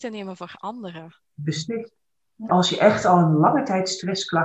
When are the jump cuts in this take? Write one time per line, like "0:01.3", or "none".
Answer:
0:01.2
0:02.5